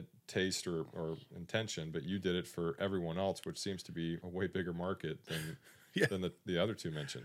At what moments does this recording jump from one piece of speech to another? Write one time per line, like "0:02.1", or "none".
0:04.2